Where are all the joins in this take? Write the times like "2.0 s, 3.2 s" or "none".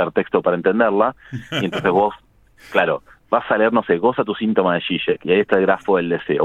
none